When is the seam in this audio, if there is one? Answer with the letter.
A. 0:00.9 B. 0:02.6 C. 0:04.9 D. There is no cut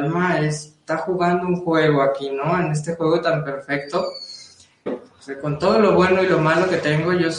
C